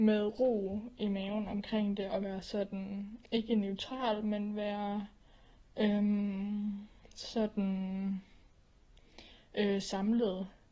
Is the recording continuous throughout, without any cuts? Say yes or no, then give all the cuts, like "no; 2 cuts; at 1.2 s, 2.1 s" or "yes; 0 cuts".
yes; 0 cuts